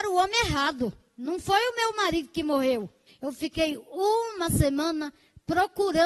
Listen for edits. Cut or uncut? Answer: cut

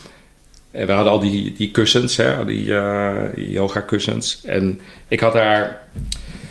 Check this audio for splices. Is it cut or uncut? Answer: uncut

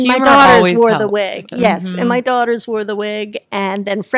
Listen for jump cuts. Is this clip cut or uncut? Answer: uncut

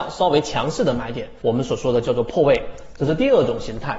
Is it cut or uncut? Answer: cut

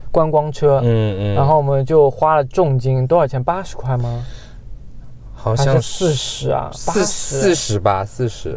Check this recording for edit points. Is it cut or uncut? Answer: uncut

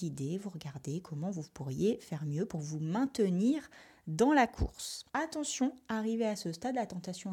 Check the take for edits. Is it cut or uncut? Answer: uncut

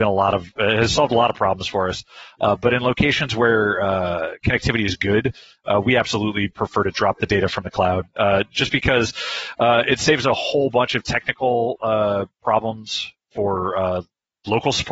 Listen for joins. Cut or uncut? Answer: uncut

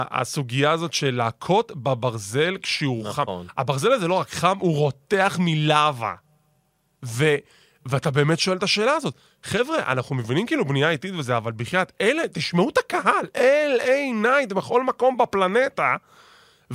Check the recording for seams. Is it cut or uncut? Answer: uncut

